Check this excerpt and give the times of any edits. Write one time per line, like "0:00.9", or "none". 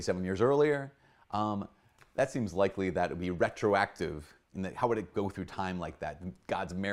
0:04.4